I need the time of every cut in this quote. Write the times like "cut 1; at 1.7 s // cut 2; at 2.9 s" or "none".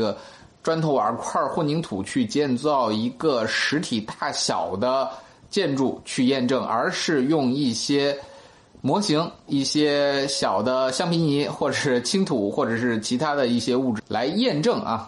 cut 1; at 9.5 s // cut 2; at 14.0 s